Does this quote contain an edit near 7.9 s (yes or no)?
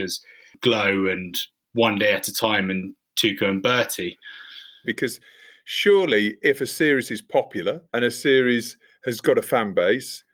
yes